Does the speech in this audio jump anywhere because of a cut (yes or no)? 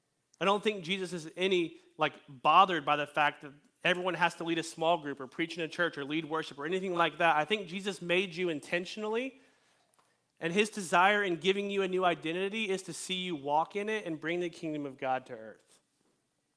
no